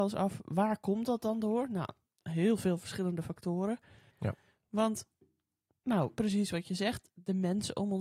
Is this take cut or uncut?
cut